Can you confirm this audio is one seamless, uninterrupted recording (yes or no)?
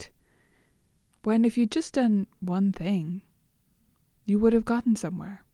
yes